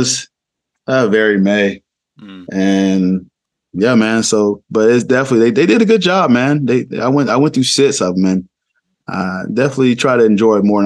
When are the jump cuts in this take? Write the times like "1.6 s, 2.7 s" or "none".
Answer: none